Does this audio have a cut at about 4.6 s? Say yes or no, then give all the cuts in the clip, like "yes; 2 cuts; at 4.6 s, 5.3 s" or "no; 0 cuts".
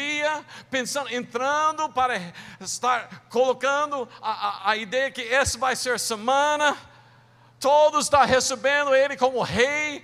no; 0 cuts